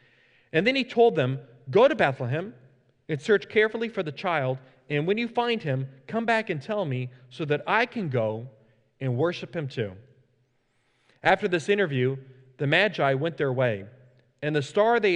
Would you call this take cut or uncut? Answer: uncut